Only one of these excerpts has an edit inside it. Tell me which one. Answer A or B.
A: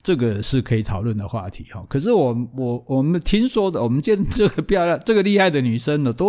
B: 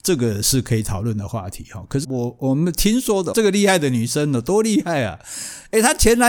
B